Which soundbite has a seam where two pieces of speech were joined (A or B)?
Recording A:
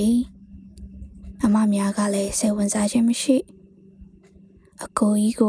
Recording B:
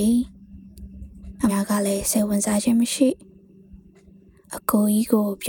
B